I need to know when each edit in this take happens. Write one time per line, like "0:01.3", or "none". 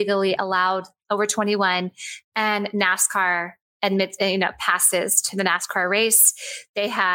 none

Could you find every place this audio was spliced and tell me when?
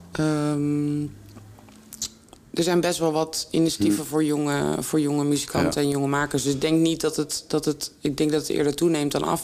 none

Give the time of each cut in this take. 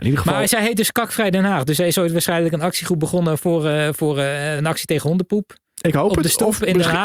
0:04.6

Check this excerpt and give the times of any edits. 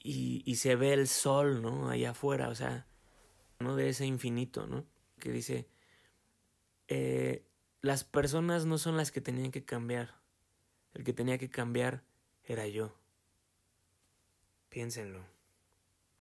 0:03.6
0:05.2

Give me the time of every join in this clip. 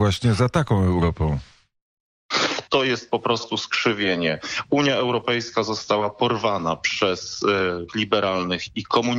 0:02.7
0:07.9

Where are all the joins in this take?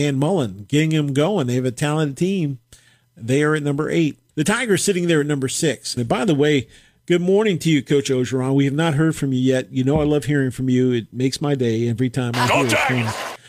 0:04.3
0:06.0

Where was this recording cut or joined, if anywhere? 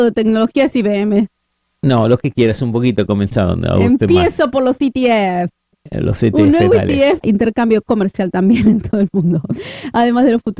0:07.2

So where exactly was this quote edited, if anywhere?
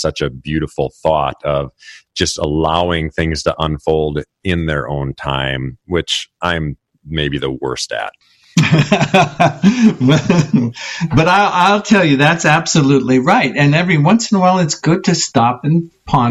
none

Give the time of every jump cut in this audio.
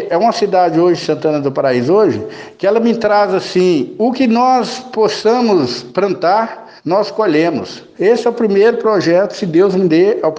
0:06.8
0:07.9

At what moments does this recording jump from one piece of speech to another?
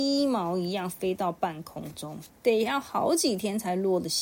0:02.3

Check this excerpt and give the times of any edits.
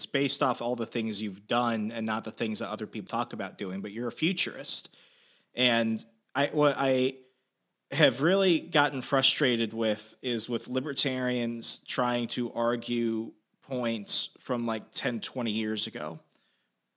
0:03.1

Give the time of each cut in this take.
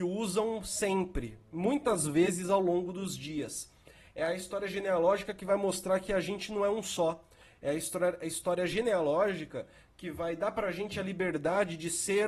none

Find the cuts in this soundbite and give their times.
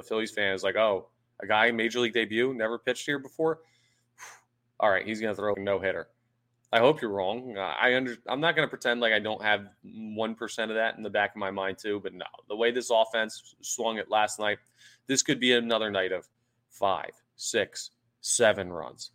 0:05.5

